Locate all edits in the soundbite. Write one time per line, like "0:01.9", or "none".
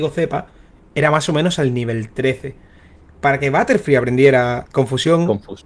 0:04.6